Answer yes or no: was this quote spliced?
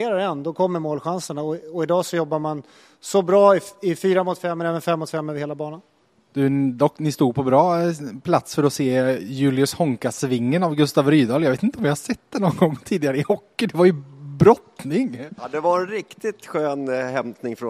no